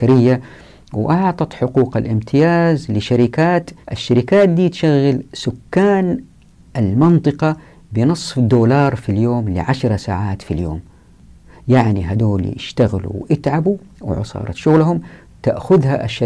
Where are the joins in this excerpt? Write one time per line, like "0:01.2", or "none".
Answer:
0:03.8